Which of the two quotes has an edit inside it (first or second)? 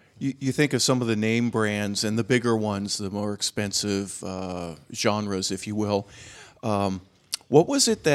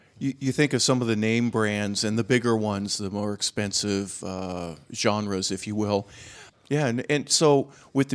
second